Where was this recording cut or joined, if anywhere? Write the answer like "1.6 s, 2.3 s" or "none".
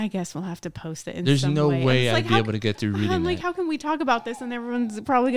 none